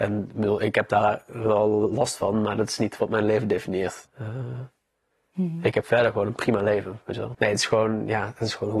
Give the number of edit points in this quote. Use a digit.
2